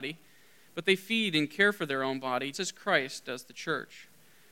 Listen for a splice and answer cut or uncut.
cut